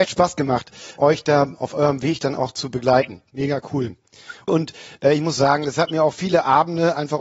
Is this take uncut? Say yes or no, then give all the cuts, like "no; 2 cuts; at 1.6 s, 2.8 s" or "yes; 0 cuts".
no; 2 cuts; at 1.0 s, 4.5 s